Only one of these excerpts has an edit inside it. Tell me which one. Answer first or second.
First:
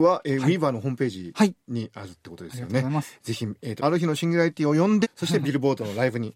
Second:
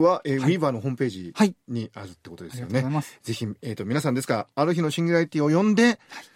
first